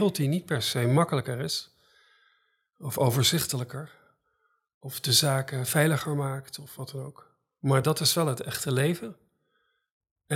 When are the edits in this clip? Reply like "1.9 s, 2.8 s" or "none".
none